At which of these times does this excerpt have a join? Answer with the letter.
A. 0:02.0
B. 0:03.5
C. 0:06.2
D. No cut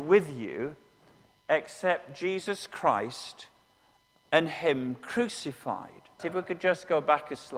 C